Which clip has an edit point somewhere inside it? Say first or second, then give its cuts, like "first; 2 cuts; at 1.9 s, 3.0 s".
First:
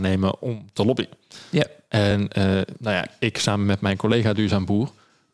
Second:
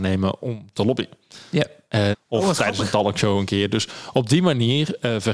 second; 1 cut; at 2.1 s